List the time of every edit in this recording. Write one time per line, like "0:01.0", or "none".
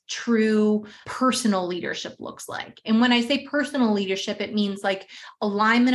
0:01.0